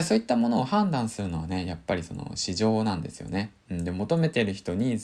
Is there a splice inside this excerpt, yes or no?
no